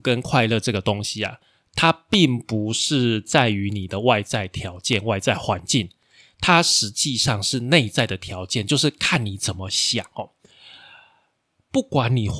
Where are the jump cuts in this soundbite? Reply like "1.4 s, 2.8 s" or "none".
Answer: none